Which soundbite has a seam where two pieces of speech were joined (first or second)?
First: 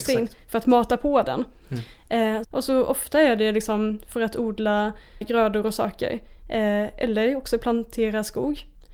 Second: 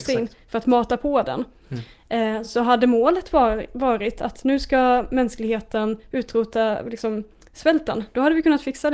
first